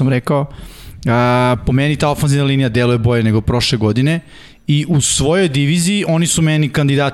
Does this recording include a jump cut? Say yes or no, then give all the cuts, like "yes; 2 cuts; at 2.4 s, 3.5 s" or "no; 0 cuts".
no; 0 cuts